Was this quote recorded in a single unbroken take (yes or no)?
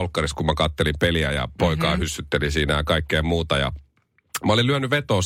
yes